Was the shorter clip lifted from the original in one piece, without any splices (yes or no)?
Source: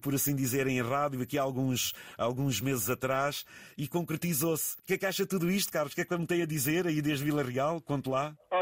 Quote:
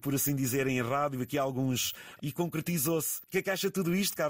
no